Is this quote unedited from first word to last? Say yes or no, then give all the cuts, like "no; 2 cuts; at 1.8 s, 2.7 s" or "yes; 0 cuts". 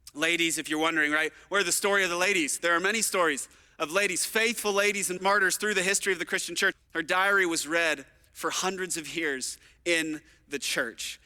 no; 2 cuts; at 5.2 s, 6.7 s